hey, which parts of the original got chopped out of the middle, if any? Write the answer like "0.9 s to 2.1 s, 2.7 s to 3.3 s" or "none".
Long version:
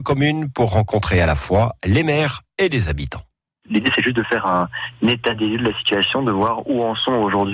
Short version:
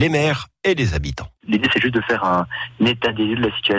3.3 s to 3.6 s